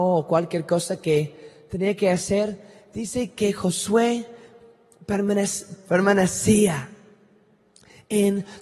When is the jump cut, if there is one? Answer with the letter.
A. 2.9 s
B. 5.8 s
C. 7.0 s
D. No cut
B